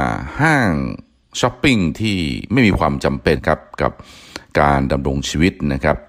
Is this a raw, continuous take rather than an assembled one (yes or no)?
no